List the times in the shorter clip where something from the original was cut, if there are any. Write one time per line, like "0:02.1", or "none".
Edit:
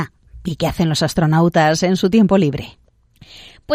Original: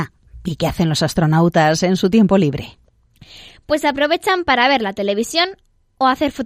none